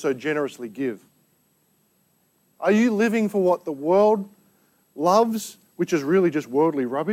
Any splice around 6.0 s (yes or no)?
no